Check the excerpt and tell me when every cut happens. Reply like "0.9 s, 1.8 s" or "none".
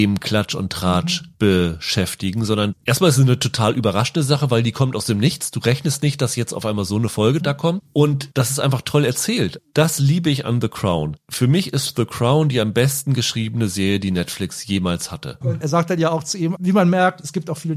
15.4 s, 16.5 s